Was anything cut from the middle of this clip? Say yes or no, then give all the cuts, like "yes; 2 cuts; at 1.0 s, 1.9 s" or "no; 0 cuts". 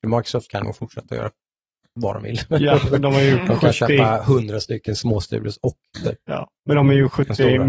no; 0 cuts